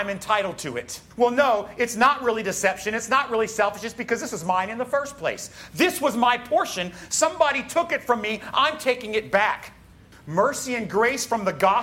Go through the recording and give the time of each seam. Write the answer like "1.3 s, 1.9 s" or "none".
1.1 s, 10.1 s